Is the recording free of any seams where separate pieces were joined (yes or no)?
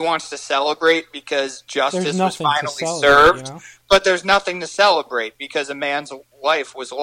yes